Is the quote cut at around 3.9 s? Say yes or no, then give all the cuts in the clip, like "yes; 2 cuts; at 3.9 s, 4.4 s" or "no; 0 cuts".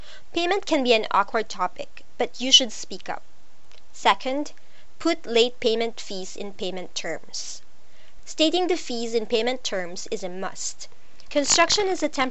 no; 2 cuts; at 8.2 s, 11.3 s